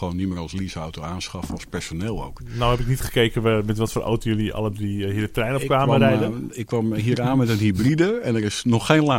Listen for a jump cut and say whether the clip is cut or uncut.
uncut